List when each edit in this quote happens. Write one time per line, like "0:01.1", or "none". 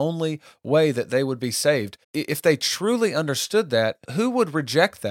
0:02.0
0:04.0